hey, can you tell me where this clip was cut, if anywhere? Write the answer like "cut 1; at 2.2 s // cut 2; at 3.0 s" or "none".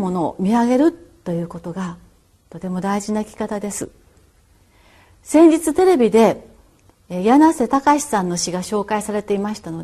none